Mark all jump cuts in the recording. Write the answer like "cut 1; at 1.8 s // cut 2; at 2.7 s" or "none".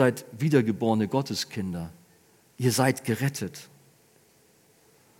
none